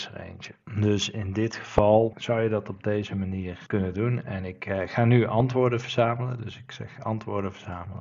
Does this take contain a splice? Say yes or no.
no